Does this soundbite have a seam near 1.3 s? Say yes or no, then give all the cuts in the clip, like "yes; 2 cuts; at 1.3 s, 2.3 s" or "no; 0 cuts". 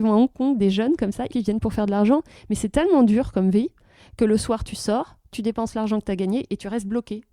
yes; 1 cut; at 1.3 s